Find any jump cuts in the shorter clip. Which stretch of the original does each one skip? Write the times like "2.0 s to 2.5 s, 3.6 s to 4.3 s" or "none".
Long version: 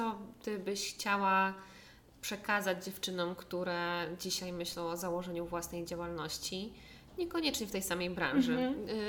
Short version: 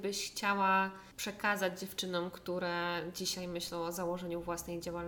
1.7 s to 2.2 s